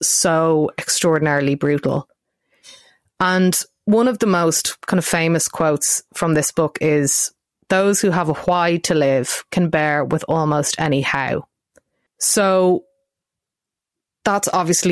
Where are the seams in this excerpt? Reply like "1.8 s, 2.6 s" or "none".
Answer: 12.1 s